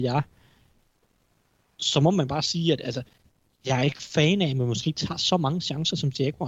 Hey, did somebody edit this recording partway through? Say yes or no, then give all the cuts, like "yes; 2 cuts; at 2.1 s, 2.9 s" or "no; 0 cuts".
no; 0 cuts